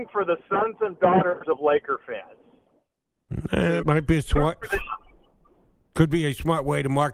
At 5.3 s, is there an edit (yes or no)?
no